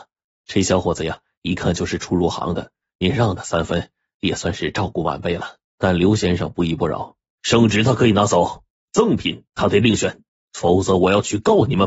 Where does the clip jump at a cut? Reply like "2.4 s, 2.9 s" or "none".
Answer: 5.7 s, 7.4 s